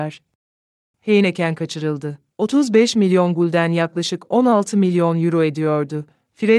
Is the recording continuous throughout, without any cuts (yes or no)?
no